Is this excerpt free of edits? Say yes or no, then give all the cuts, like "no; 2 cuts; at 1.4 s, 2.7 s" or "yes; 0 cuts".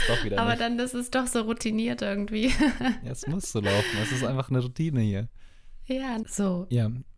no; 1 cut; at 6.2 s